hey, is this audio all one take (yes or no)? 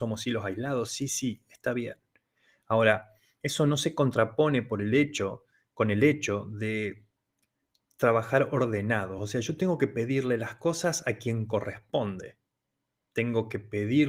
yes